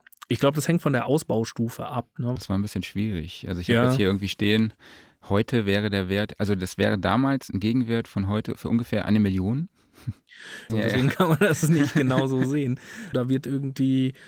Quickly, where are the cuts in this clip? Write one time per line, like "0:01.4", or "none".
0:02.4
0:10.7
0:13.1